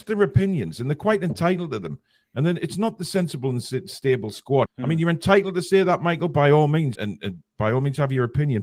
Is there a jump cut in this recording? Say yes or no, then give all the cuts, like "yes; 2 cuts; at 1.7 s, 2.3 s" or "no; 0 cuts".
yes; 2 cuts; at 4.7 s, 7.0 s